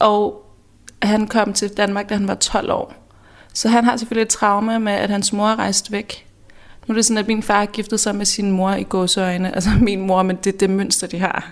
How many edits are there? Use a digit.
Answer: 0